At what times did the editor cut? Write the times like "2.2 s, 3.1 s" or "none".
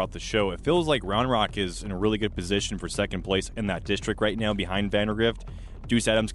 none